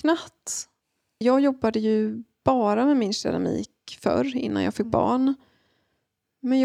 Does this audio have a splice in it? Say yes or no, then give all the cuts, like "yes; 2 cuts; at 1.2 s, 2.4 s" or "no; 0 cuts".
yes; 1 cut; at 1.2 s